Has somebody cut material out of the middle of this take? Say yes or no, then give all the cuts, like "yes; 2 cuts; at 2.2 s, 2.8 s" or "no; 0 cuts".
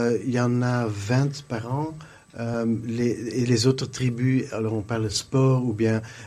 no; 0 cuts